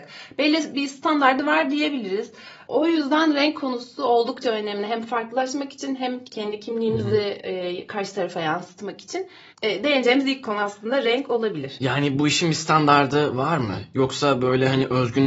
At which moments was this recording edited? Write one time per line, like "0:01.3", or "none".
0:02.7